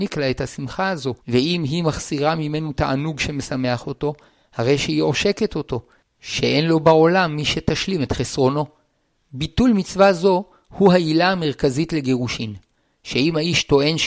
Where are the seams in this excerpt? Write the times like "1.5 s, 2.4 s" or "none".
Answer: 1.2 s